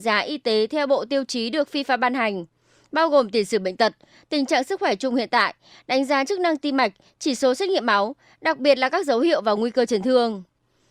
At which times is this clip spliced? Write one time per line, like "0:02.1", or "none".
none